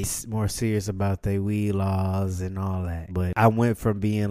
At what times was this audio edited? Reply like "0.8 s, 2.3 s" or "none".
3.1 s